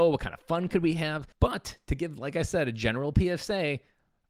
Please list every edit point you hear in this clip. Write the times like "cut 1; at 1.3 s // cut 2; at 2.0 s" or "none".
cut 1; at 1.3 s